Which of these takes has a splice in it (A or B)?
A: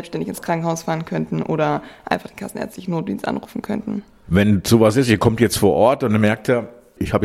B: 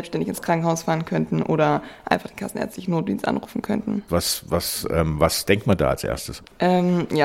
B